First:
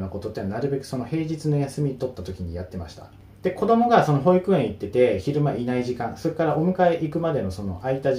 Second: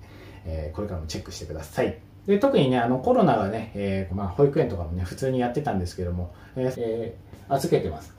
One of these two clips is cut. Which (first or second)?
second